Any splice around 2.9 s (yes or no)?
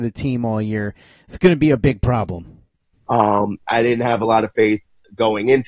yes